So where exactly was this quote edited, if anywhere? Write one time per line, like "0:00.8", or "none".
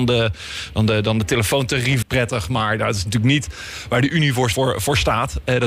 0:02.0
0:04.5